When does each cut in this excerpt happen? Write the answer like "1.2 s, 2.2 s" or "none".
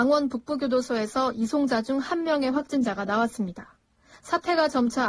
none